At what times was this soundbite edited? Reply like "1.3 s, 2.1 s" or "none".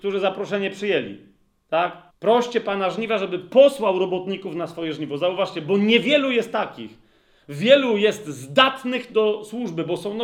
2.1 s